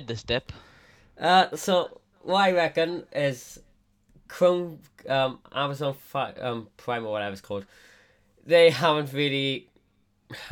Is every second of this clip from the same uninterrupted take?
yes; 0 cuts

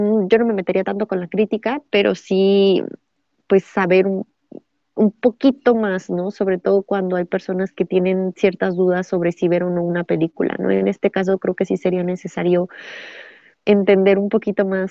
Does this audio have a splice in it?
no; 0 cuts

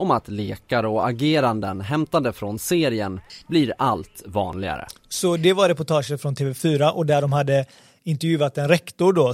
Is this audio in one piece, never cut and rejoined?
yes; 0 cuts

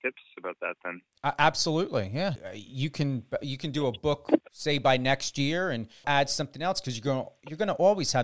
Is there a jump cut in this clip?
yes; 2 cuts; at 2.4 s, 6.0 s

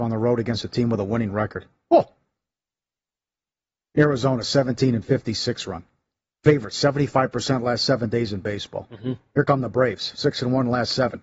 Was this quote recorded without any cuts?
yes; 0 cuts

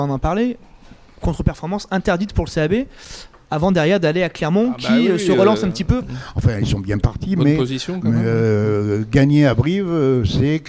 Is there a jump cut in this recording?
yes; 1 cut; at 6.0 s

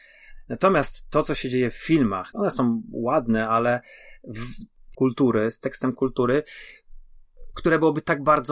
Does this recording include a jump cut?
yes; 3 cuts; at 2.3 s, 4.9 s, 7.5 s

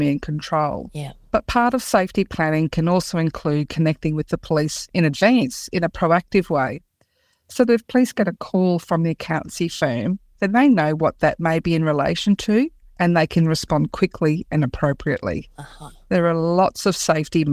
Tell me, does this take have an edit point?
no; 0 cuts

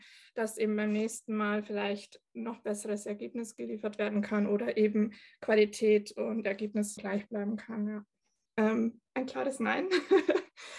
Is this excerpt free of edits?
no; 2 cuts; at 7.0 s, 8.5 s

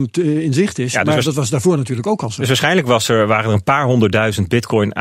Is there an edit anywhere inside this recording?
no; 0 cuts

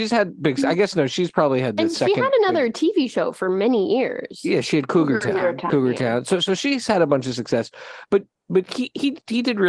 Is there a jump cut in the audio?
yes; 1 cut; at 5.7 s

